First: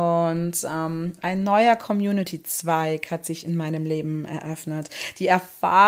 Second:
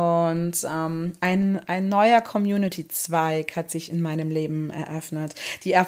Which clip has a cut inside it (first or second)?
first